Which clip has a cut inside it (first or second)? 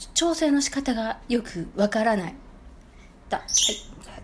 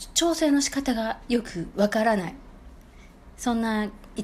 first